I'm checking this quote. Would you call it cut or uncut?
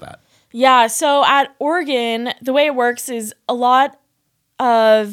uncut